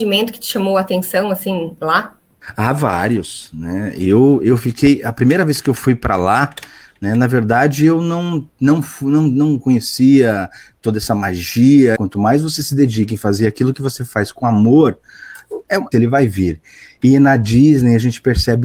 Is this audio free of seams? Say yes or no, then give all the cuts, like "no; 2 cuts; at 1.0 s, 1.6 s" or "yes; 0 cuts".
no; 2 cuts; at 12.0 s, 15.9 s